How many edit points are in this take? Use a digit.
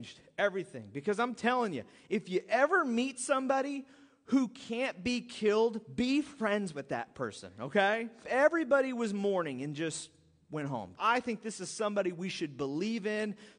2